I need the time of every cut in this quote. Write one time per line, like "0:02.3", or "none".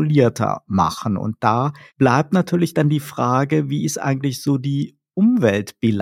none